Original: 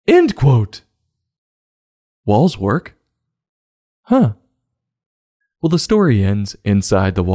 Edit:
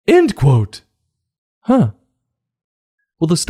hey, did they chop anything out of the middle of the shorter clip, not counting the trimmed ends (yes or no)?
yes